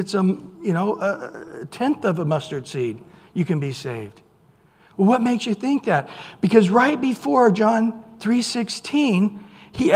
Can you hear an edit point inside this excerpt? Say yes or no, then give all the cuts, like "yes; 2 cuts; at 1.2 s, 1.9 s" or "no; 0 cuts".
no; 0 cuts